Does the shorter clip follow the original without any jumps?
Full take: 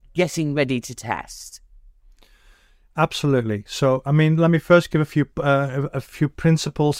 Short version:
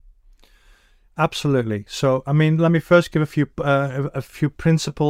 yes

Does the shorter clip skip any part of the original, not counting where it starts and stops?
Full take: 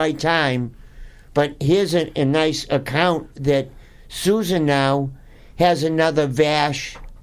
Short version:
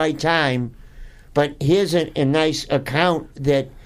no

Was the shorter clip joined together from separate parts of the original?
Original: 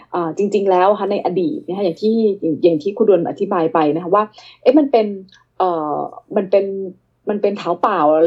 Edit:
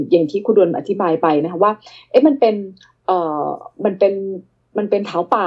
no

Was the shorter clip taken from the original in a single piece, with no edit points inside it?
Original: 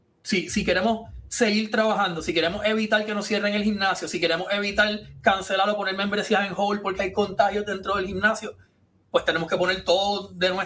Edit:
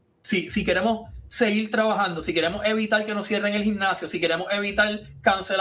yes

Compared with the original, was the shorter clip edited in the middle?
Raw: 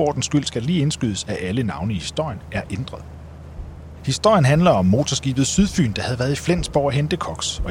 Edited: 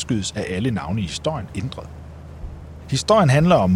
yes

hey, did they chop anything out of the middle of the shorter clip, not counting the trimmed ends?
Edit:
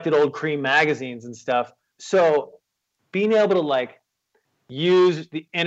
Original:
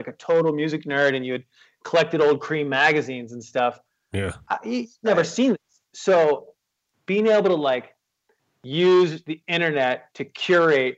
yes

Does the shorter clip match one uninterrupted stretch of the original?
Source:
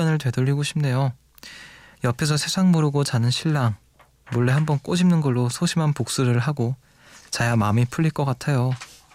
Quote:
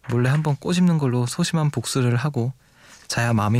yes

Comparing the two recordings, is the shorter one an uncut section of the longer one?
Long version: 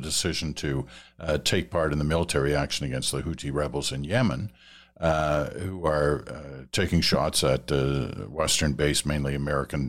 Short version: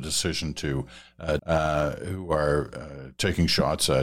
no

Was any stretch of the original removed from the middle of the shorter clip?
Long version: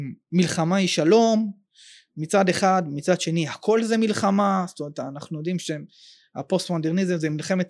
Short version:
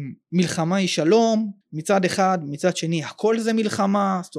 yes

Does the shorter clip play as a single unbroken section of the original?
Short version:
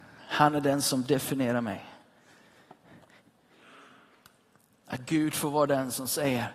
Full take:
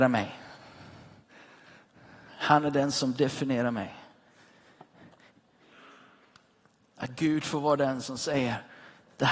yes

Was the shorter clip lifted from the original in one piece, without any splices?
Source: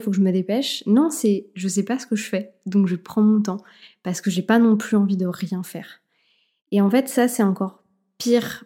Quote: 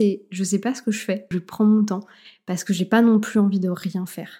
no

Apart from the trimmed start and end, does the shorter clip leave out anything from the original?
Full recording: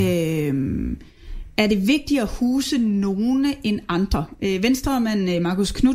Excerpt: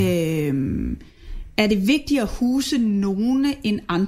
no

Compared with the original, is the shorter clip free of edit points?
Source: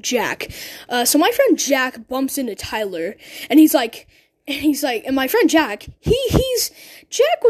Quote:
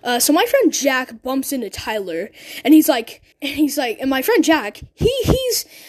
no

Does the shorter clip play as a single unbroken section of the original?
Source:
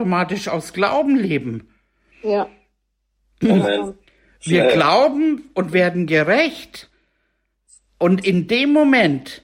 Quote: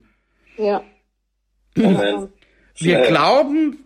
yes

